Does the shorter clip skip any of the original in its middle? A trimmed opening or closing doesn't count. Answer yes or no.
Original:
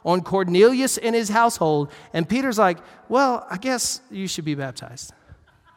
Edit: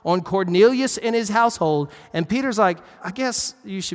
yes